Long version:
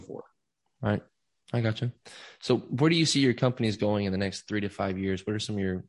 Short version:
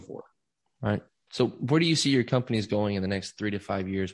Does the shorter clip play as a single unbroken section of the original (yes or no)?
no